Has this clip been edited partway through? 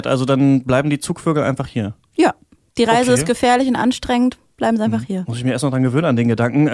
yes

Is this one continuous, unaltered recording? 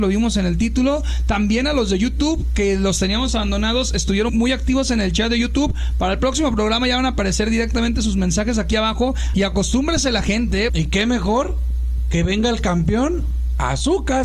no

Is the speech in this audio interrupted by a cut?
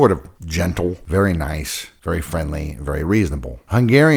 no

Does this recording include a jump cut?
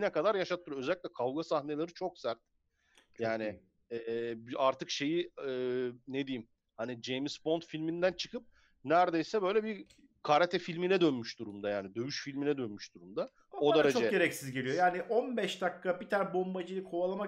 no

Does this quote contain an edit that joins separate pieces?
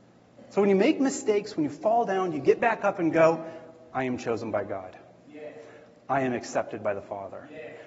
no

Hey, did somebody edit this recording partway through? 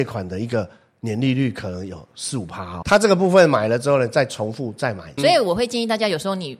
yes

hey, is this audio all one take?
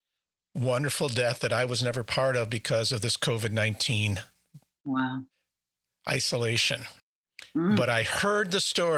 yes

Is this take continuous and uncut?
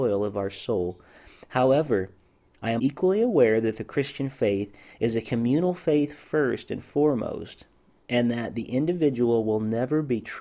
no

